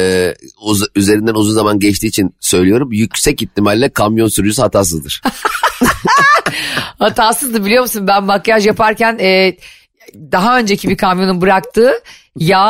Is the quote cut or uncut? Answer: uncut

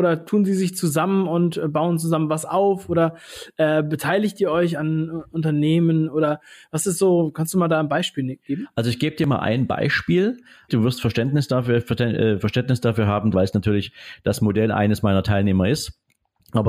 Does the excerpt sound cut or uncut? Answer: cut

